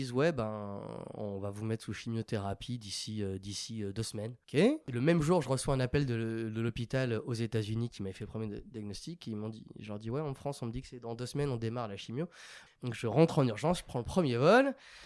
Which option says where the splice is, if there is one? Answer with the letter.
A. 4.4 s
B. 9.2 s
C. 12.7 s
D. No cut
C